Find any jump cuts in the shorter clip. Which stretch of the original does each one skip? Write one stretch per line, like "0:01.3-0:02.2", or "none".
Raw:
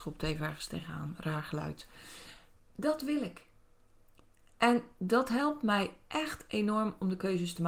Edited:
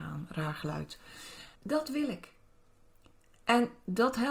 0:02.4-0:02.7